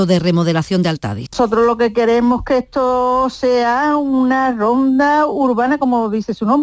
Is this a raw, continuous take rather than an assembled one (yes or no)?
no